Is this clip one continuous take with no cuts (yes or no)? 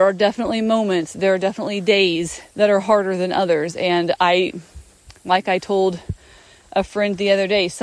no